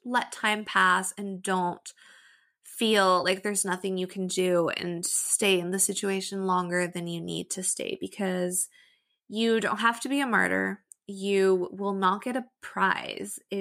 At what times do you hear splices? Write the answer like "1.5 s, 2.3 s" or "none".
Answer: none